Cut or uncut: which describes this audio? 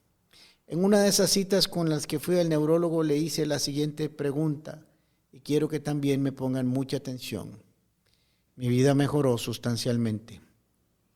cut